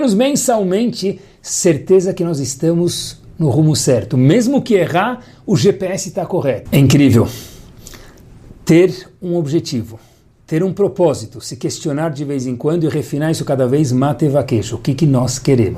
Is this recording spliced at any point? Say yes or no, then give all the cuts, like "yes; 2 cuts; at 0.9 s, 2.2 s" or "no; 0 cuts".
yes; 1 cut; at 6.7 s